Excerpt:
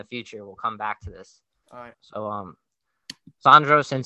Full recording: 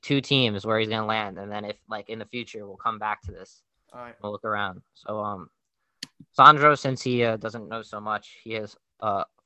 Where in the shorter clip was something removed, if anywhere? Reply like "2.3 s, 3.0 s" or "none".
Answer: 1.9 s